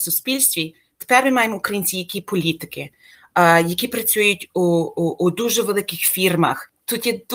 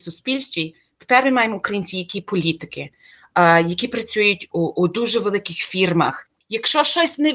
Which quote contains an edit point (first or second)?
second